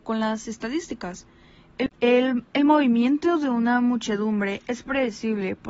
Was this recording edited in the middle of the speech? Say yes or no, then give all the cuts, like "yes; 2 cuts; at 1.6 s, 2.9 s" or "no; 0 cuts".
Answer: no; 0 cuts